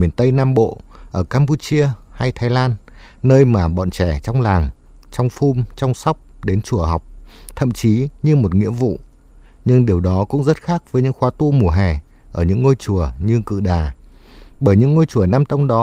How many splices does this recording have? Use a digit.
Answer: 0